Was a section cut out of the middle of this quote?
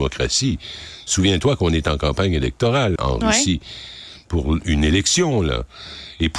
yes; 1 cut; at 3.0 s

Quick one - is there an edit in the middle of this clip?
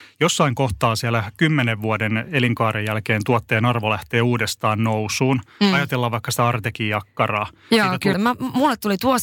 yes; 1 cut; at 8.1 s

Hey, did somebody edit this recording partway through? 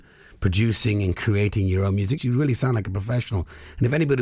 yes; 1 cut; at 2.2 s

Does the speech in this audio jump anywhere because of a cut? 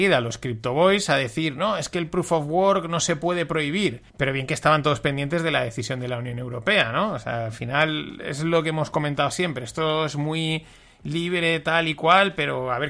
yes; 1 cut; at 4.1 s

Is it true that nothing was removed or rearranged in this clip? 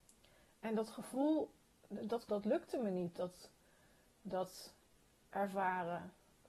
no; 1 cut; at 2.3 s

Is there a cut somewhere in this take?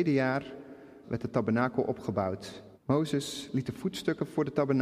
yes; 2 cuts; at 1.0 s, 2.7 s

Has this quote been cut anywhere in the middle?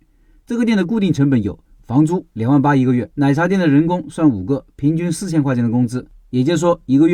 yes; 1 cut; at 3.1 s

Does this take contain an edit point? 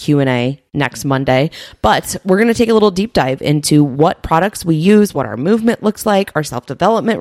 yes; 1 cut; at 5.1 s

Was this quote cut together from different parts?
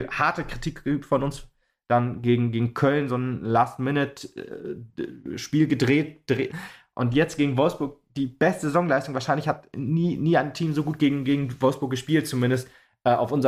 yes; 1 cut; at 6.5 s

